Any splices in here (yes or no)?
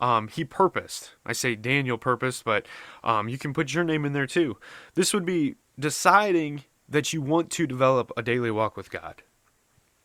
yes